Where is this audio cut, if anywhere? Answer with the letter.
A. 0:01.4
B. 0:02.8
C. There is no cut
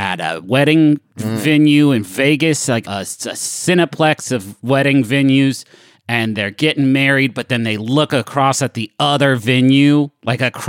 B